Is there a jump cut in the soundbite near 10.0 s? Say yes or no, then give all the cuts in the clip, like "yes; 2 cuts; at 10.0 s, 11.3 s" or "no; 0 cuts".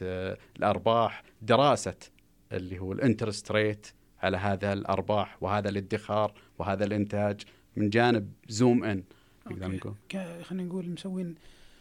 yes; 1 cut; at 10.0 s